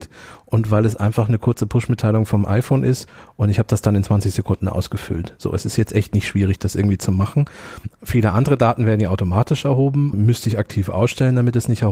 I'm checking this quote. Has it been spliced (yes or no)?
yes